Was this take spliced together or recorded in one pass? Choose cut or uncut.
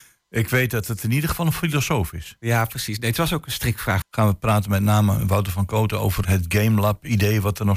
cut